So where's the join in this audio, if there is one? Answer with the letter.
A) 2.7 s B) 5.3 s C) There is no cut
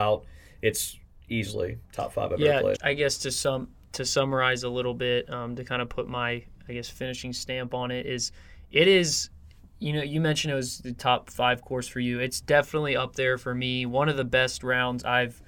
A